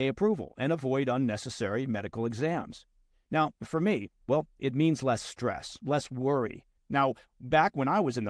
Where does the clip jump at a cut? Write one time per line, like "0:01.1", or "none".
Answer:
0:04.2
0:06.8